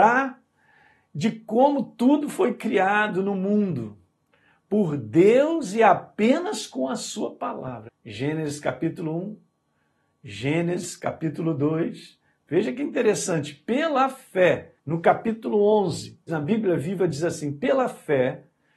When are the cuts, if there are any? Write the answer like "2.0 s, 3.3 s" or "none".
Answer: 7.9 s, 14.8 s, 16.3 s